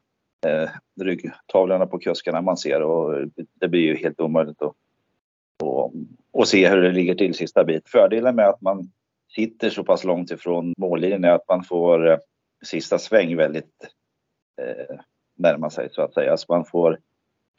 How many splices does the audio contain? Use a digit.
2